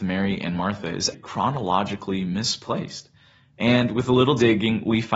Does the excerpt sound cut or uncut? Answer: cut